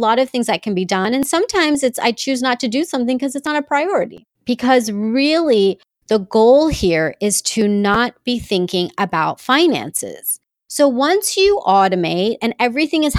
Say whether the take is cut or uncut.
cut